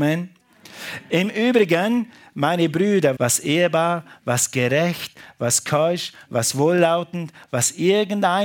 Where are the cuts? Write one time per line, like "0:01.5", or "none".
0:03.2
0:06.3